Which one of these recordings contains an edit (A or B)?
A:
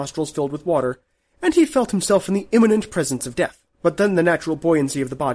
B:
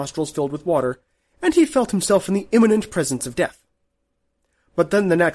A